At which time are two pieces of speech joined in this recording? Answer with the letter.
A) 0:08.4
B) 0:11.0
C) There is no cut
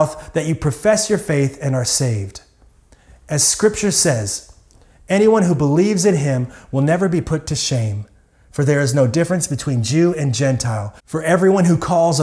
B